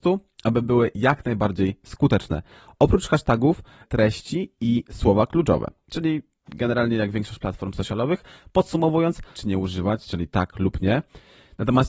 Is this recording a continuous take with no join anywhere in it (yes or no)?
no